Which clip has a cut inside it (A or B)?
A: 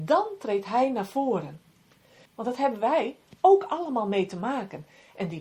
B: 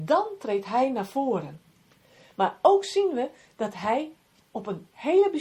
A